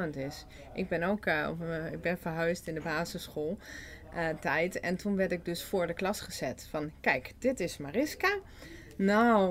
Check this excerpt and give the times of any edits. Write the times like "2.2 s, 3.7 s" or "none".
none